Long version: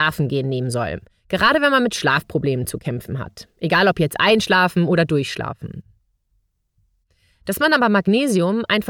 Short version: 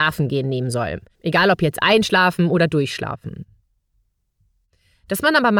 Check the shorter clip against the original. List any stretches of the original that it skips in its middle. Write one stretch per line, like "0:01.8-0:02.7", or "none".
0:01.1-0:03.5